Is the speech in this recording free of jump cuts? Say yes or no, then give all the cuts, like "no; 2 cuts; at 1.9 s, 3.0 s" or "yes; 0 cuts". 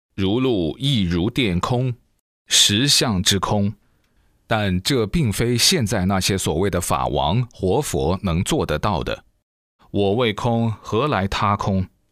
no; 1 cut; at 9.8 s